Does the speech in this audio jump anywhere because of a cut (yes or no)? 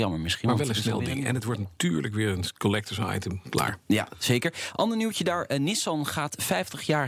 no